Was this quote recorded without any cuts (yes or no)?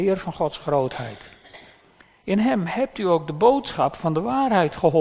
yes